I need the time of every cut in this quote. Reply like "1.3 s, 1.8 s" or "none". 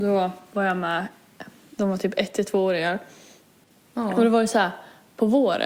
none

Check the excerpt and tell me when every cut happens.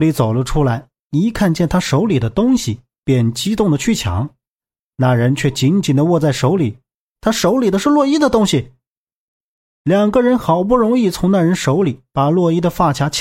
7.1 s

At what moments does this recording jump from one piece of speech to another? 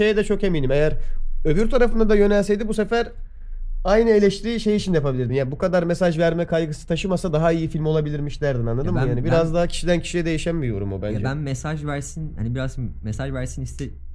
none

